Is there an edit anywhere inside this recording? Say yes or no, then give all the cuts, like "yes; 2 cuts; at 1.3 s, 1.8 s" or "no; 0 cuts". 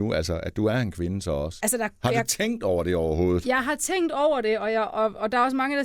no; 0 cuts